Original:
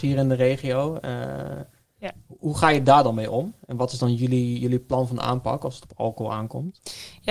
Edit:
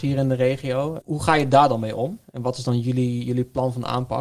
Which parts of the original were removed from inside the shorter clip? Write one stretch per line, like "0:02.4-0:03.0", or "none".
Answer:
0:01.0-0:02.4